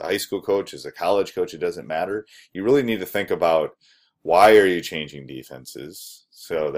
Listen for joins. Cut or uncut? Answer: uncut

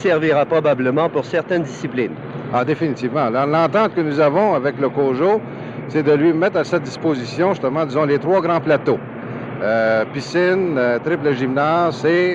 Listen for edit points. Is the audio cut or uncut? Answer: uncut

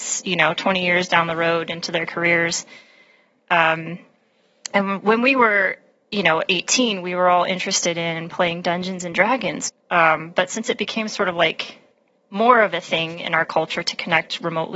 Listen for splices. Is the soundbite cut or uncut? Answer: cut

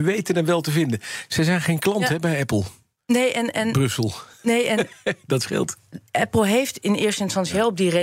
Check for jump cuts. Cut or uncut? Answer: uncut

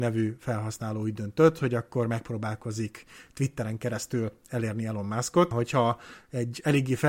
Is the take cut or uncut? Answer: cut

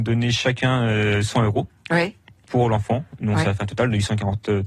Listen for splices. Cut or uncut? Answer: uncut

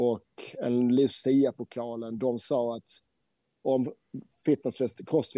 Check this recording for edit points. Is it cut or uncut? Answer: uncut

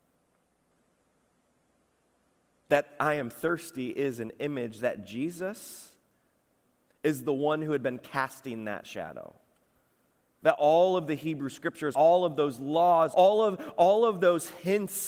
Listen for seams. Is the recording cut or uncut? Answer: cut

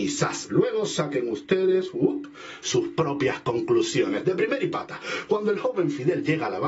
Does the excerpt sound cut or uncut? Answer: uncut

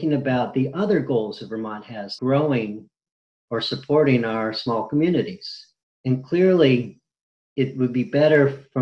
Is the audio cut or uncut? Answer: cut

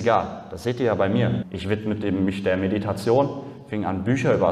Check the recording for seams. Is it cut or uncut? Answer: cut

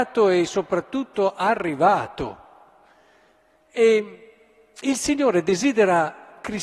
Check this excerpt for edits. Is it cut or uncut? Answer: uncut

